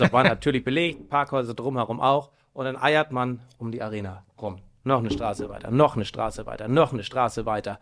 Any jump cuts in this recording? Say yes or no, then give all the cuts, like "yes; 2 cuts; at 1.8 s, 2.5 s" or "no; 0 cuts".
no; 0 cuts